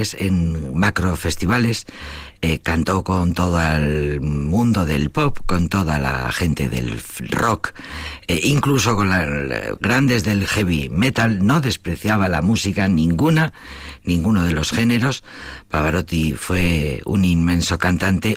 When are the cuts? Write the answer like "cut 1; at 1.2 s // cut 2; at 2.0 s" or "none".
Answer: cut 1; at 9.8 s

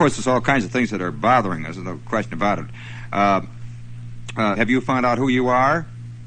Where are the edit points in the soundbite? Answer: cut 1; at 4.6 s

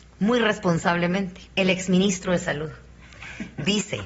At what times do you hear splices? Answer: cut 1; at 1.5 s

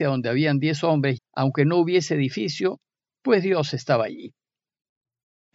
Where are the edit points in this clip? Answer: cut 1; at 1.2 s

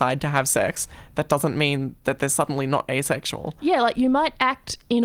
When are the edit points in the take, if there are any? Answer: none

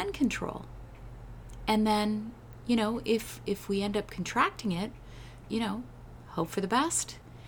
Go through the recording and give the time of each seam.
cut 1; at 5.4 s

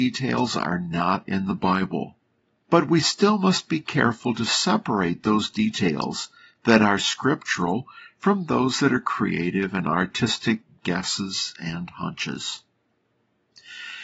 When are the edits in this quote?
cut 1; at 2.6 s

